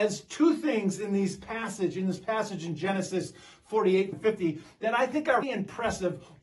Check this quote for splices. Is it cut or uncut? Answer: cut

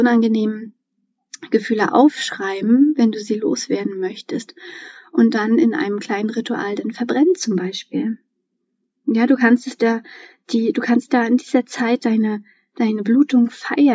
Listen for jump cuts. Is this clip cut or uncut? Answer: cut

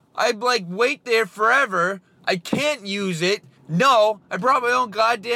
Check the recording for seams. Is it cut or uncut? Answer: cut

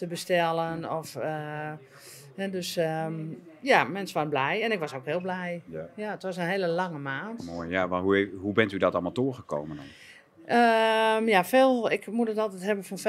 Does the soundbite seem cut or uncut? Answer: uncut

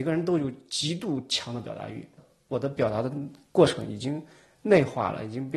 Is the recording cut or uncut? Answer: cut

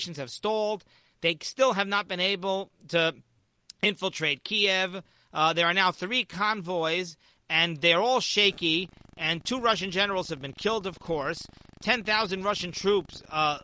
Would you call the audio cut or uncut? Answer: uncut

